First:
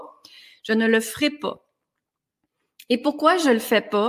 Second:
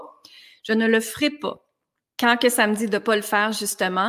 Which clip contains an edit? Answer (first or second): second